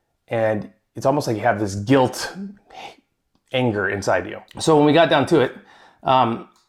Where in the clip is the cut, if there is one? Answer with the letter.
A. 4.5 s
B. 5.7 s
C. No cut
A